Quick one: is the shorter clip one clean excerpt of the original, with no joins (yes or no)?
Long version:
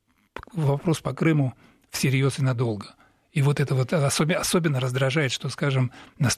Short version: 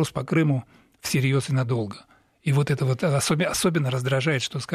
yes